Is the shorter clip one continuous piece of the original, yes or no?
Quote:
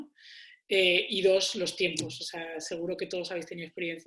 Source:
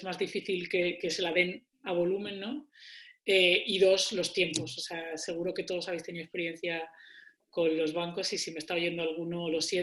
yes